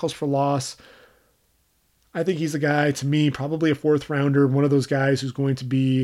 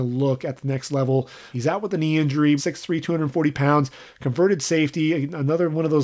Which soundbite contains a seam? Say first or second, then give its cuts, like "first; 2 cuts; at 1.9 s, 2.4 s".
second; 2 cuts; at 1.5 s, 2.6 s